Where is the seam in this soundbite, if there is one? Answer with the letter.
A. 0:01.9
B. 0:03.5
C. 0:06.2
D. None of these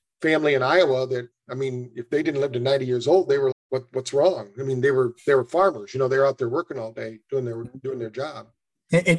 B